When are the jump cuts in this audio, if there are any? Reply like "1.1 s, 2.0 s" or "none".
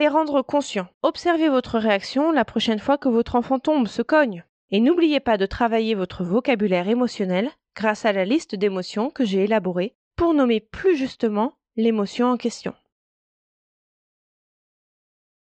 0.9 s, 4.6 s, 10.0 s